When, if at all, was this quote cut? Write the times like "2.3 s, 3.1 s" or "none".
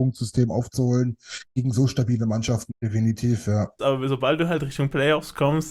2.7 s, 3.8 s